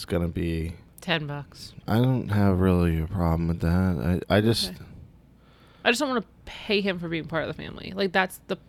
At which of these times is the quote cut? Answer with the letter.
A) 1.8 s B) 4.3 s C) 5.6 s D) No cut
A